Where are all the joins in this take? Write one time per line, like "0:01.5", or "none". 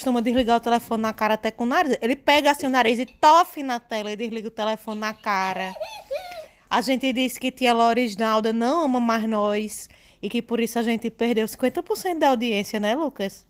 none

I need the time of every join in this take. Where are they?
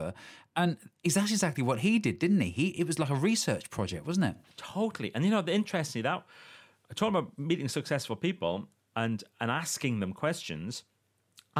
none

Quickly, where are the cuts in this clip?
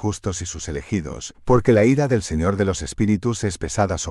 0:01.3

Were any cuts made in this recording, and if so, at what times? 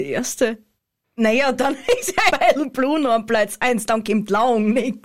0:01.0
0:02.3

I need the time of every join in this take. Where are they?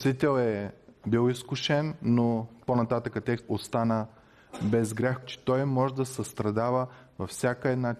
0:03.4
0:05.2

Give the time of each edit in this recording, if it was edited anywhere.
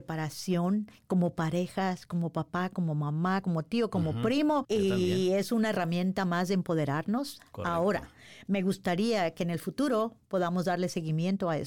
0:03.4
0:04.6

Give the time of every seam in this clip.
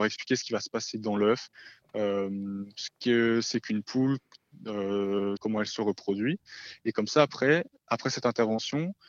0:05.4

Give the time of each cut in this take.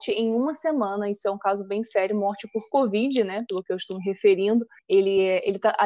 0:04.8

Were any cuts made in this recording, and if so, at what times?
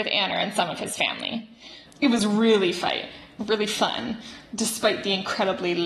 0:01.9

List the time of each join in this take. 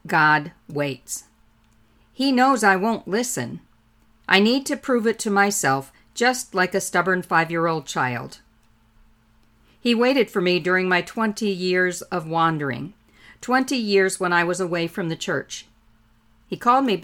none

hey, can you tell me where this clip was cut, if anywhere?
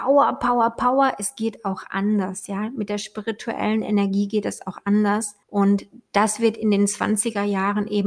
0:05.4

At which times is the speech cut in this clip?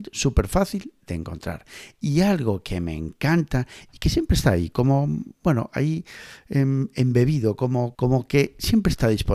0:07.9

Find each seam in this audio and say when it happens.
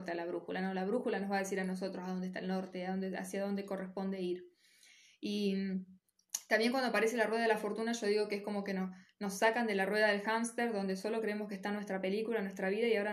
none

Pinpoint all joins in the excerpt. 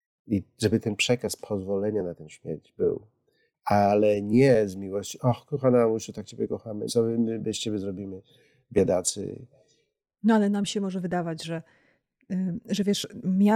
0:06.9
0:10.1

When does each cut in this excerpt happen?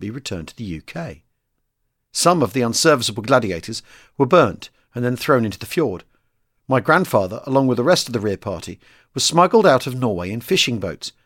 none

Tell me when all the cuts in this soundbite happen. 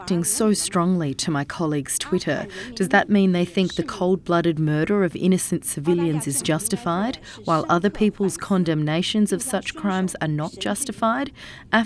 none

